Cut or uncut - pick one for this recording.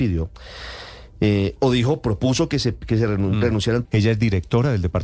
cut